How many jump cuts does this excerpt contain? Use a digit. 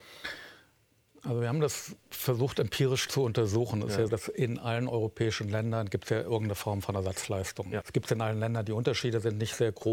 2